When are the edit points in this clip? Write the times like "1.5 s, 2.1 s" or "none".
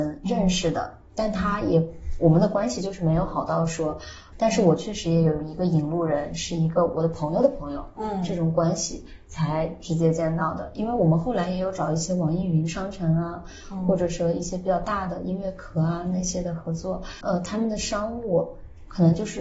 4.3 s, 17.2 s